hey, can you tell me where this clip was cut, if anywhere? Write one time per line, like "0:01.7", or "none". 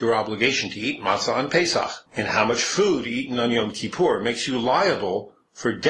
none